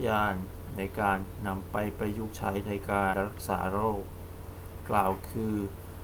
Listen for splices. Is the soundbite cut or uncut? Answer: cut